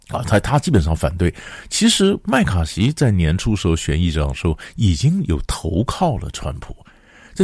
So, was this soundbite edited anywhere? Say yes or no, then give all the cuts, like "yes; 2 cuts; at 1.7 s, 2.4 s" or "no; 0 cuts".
no; 0 cuts